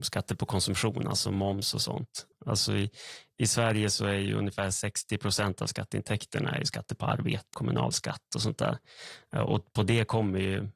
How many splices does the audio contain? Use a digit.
2